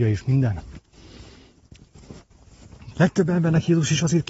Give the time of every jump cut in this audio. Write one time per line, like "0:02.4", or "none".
0:02.9